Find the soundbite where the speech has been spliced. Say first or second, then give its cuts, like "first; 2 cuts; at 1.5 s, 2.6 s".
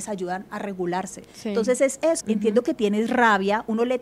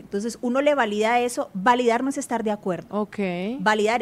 first; 1 cut; at 2.2 s